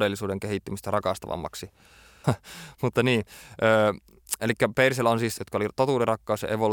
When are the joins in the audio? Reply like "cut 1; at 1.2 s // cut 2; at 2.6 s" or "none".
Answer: cut 1; at 2.2 s // cut 2; at 5.4 s

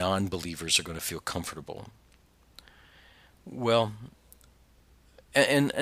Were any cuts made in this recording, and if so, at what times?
none

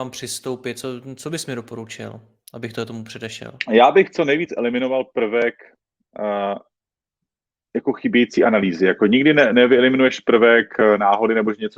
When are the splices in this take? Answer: none

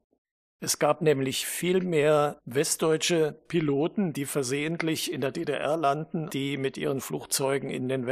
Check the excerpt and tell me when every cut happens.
cut 1; at 6.3 s

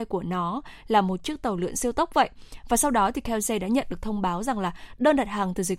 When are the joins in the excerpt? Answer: none

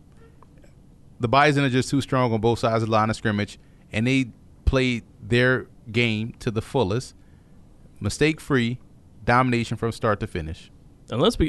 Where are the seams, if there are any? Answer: none

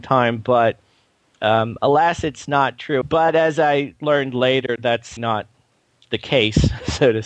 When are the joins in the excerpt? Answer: cut 1; at 3.0 s // cut 2; at 5.2 s

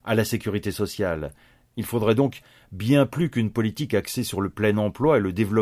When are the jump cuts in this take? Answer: cut 1; at 1.7 s

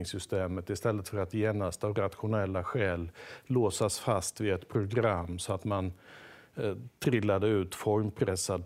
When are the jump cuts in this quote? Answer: none

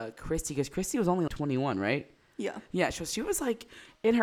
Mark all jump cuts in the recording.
cut 1; at 1.3 s

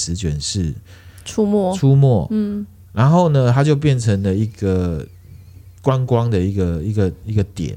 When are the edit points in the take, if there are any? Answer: none

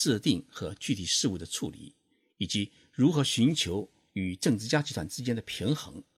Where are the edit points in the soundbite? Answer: none

